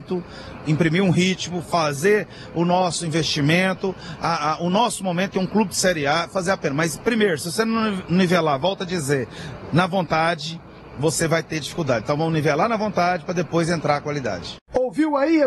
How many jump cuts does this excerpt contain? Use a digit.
1